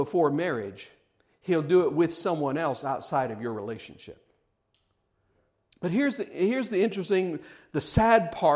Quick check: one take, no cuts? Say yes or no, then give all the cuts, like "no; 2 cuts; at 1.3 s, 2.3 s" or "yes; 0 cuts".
no; 1 cut; at 5.7 s